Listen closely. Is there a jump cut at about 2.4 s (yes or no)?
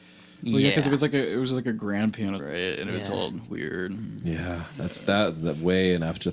yes